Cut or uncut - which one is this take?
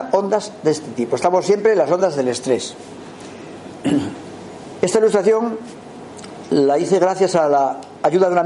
uncut